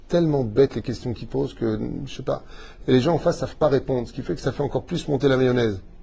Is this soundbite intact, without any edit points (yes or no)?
yes